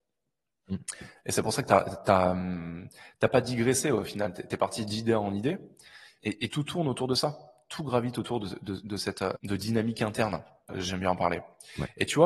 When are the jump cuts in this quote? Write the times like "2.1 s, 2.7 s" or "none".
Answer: 6.2 s, 9.4 s, 10.7 s